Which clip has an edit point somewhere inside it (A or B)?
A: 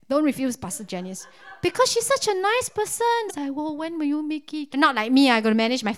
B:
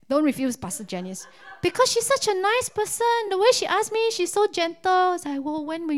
A